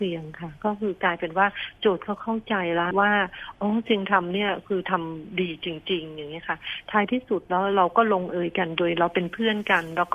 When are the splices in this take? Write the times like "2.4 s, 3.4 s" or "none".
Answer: 2.9 s